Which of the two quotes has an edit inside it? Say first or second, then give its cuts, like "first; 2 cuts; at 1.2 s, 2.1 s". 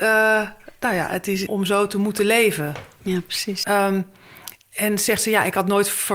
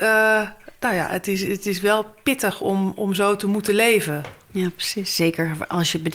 first; 2 cuts; at 1.5 s, 3.6 s